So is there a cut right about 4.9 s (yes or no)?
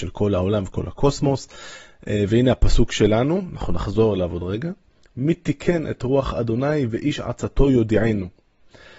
no